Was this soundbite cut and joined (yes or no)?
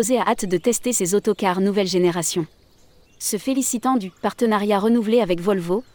yes